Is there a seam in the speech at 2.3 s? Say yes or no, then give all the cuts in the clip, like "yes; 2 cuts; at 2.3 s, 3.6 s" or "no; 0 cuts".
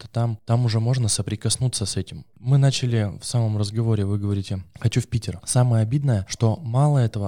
yes; 2 cuts; at 2.3 s, 5.4 s